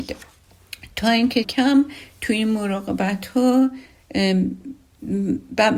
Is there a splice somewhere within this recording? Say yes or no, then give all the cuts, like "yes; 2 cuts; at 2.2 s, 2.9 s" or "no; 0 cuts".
yes; 1 cut; at 1.4 s